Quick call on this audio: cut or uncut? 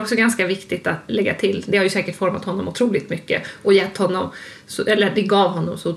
cut